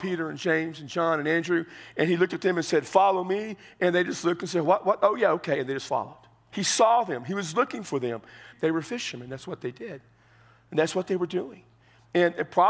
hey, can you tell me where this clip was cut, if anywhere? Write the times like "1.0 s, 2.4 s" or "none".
6.5 s, 8.5 s